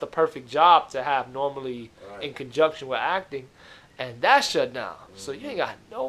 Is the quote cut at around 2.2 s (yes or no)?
no